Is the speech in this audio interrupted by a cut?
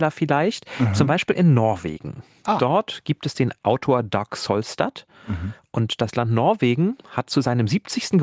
no; 0 cuts

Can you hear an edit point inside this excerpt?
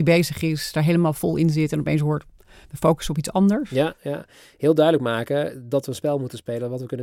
no; 0 cuts

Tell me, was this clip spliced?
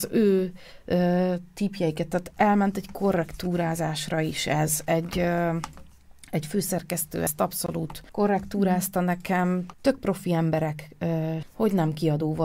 yes; 3 cuts; at 8.1 s, 9.7 s, 11.4 s

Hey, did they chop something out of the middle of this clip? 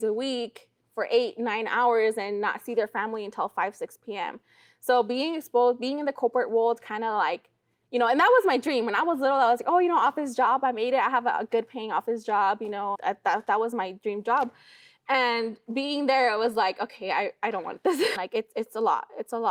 yes; 2 cuts; at 12.9 s, 18.2 s

